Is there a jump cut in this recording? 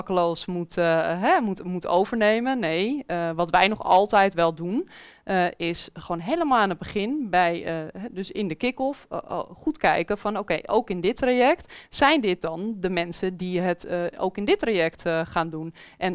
no; 0 cuts

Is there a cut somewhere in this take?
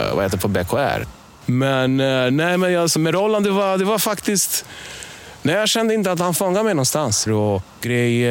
yes; 2 cuts; at 3.0 s, 7.3 s

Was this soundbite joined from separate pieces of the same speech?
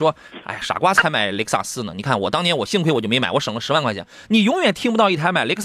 no; 0 cuts

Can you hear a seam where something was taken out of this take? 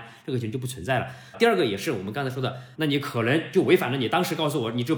yes; 2 cuts; at 1.3 s, 2.7 s

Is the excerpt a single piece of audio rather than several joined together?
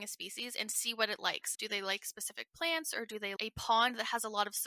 no; 2 cuts; at 1.5 s, 3.4 s

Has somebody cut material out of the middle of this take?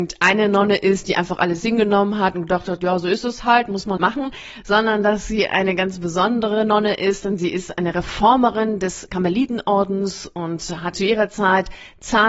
yes; 2 cuts; at 4.0 s, 10.9 s

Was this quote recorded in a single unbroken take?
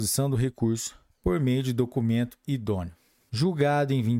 no; 1 cut; at 3.3 s

